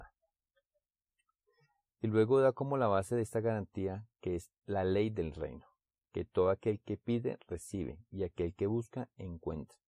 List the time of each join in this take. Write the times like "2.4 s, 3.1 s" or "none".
none